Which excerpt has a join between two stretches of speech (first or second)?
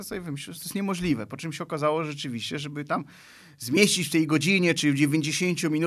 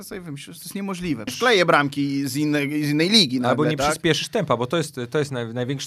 second